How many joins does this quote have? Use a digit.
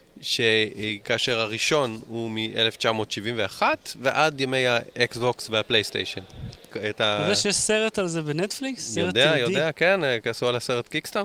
2